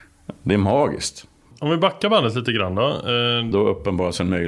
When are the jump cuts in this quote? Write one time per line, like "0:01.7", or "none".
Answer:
0:03.5